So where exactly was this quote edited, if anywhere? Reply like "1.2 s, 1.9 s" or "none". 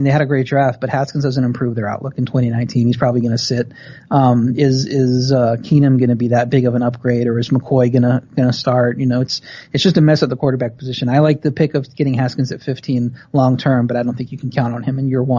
none